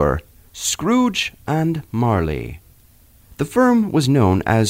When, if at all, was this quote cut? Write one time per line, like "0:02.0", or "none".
none